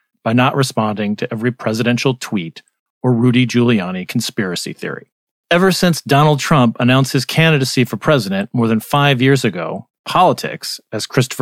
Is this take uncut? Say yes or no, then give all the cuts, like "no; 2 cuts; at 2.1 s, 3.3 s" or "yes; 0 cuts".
no; 1 cut; at 5.3 s